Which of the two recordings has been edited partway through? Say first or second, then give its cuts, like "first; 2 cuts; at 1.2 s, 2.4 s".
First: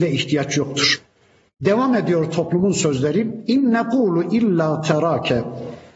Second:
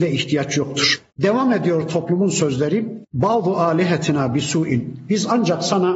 second; 2 cuts; at 1.1 s, 3.0 s